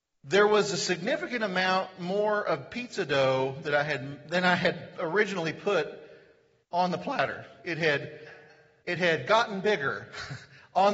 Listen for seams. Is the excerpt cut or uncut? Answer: uncut